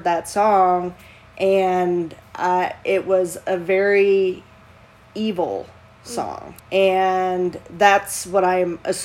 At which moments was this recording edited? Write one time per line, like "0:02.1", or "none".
0:06.6